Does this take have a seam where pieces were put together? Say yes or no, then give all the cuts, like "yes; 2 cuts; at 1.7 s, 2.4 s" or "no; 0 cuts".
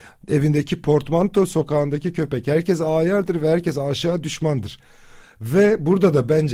yes; 1 cut; at 5.2 s